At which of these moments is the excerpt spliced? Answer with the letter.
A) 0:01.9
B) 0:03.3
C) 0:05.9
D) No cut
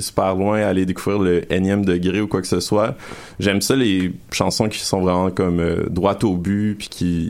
D